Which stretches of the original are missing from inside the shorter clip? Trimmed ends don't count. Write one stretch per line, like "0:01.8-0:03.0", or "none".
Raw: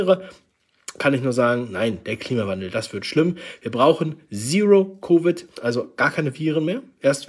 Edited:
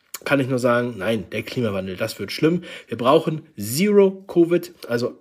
none